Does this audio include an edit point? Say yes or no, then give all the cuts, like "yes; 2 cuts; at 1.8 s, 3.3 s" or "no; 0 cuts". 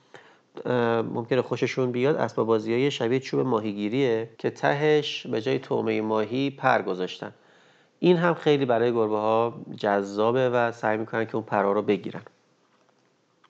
yes; 1 cut; at 4.3 s